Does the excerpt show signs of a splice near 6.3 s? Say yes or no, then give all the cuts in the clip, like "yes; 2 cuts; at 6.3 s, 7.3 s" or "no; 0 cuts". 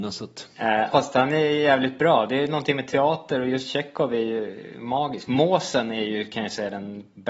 no; 1 cut; at 0.9 s